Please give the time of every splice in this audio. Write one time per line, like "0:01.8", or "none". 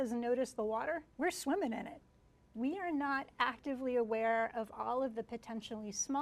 0:01.1